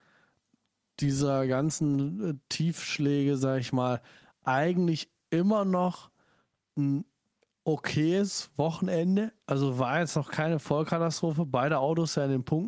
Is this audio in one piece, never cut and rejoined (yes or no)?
yes